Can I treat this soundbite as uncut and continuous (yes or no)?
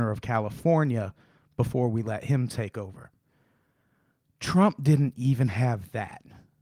yes